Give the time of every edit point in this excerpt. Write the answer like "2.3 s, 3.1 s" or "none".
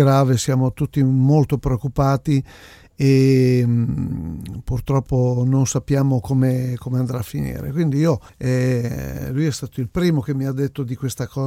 8.3 s